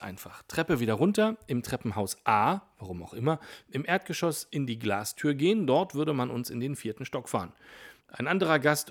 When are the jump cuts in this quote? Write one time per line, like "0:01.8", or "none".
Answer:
0:08.0